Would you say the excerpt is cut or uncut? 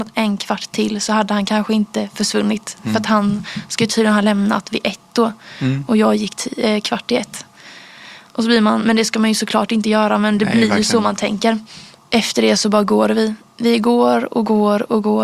uncut